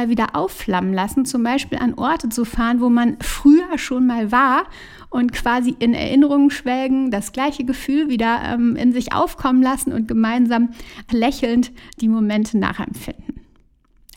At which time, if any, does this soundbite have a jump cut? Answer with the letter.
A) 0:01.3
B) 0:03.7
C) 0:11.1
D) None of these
C